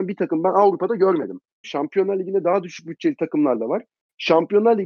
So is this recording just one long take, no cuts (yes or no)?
no